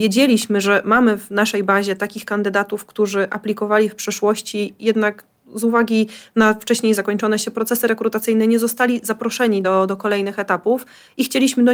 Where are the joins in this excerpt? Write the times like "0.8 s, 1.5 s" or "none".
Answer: none